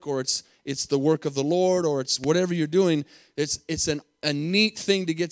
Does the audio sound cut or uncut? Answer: uncut